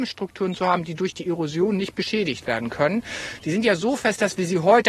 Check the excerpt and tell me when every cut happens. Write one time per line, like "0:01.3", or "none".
none